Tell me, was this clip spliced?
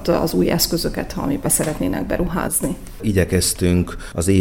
yes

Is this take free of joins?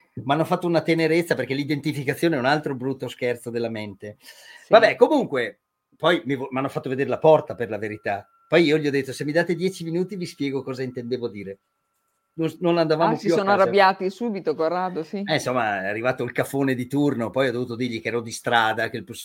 yes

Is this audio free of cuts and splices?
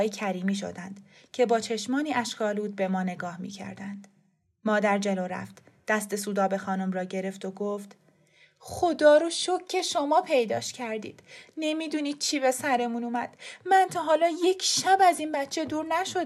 yes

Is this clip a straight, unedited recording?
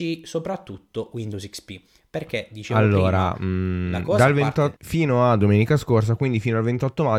no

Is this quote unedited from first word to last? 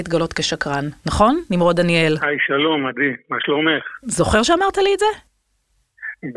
no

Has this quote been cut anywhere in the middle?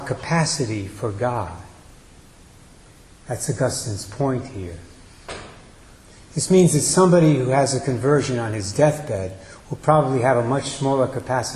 no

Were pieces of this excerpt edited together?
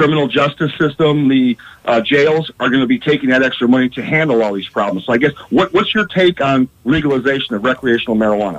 no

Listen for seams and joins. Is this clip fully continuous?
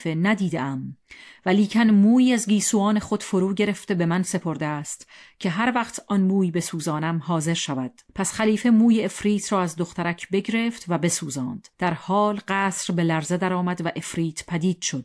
no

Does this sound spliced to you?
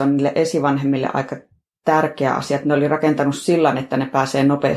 no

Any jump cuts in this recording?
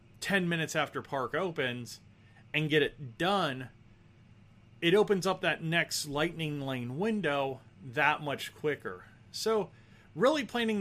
no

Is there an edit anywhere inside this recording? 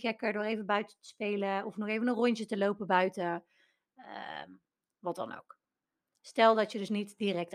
no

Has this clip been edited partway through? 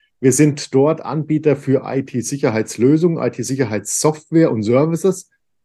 no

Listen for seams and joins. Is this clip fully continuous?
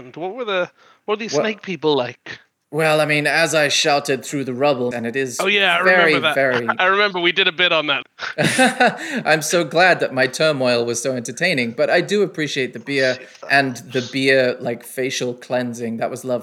no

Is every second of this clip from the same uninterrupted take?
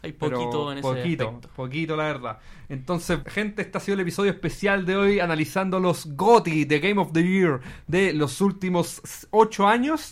no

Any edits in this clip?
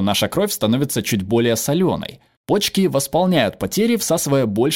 no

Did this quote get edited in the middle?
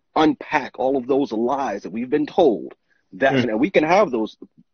yes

